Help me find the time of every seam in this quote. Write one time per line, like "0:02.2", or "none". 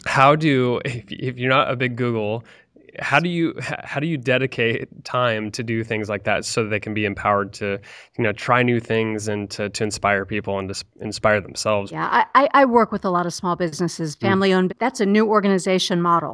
0:11.9
0:14.7